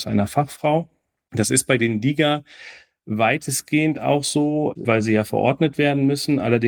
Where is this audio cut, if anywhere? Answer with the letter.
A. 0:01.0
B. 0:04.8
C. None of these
B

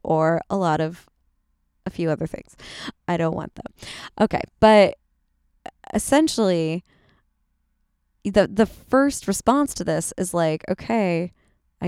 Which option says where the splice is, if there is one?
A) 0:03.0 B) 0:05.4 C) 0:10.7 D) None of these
A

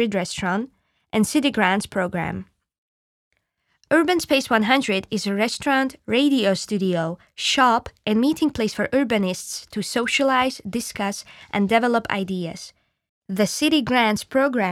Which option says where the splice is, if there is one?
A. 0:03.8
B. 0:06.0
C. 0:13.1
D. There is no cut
C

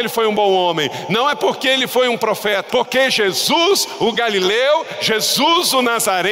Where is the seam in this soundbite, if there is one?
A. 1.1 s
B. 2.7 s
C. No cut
B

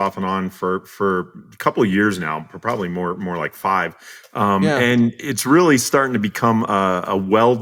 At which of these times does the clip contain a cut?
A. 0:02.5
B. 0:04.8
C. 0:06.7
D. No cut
D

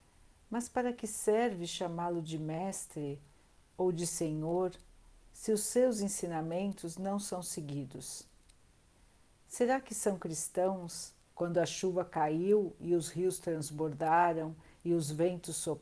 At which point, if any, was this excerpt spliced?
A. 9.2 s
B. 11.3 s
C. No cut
B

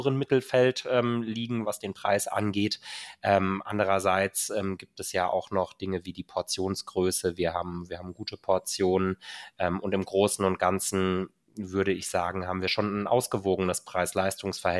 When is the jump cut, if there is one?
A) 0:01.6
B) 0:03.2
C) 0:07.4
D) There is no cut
A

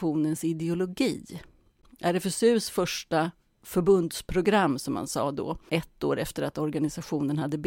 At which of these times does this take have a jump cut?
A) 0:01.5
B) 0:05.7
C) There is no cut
B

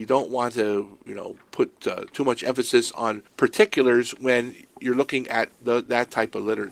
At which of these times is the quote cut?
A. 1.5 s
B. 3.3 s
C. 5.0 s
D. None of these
B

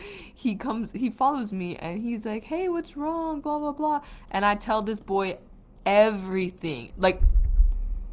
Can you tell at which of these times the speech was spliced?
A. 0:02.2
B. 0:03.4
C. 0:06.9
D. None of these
C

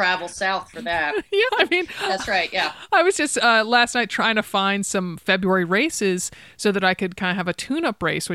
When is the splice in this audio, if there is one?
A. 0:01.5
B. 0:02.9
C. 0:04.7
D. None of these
A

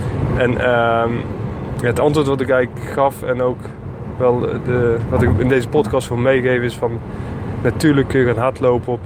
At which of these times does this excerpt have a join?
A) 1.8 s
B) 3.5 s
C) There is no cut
C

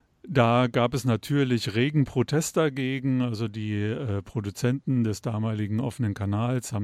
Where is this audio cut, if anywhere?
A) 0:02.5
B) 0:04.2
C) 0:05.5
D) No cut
D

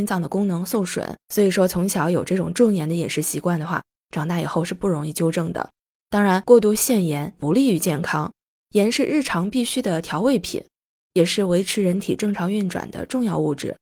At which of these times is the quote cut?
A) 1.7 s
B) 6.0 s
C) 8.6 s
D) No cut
D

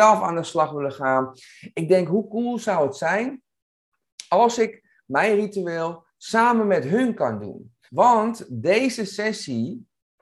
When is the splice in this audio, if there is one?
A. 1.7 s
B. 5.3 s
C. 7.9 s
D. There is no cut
C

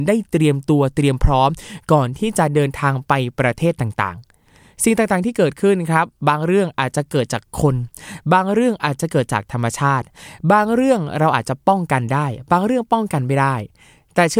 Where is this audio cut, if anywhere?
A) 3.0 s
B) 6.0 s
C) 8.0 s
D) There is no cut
D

